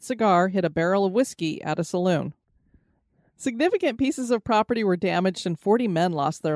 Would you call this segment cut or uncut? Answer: uncut